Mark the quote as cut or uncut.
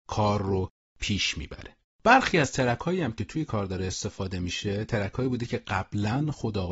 uncut